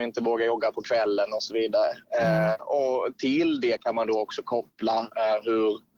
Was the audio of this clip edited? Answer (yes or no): no